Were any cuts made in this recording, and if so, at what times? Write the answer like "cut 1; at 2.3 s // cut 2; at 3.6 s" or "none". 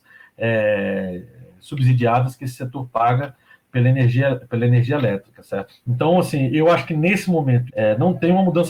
cut 1; at 5.7 s // cut 2; at 7.7 s